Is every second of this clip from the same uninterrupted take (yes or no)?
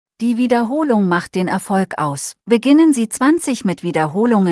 no